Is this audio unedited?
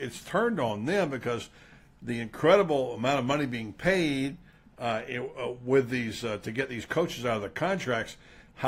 yes; 0 cuts

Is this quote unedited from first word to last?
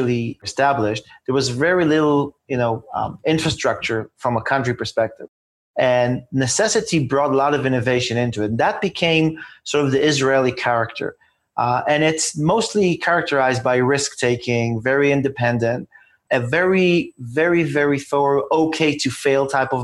yes; 0 cuts

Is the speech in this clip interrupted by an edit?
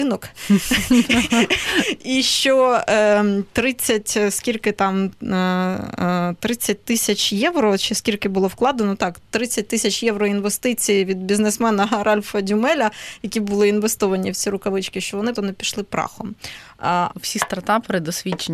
yes; 2 cuts; at 15.4 s, 17.1 s

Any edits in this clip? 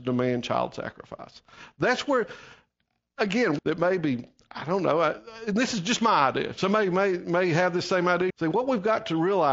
yes; 2 cuts; at 3.6 s, 8.3 s

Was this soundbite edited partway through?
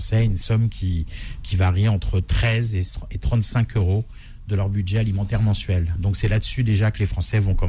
no; 0 cuts

